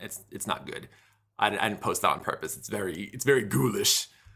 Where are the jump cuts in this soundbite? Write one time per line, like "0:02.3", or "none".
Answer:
none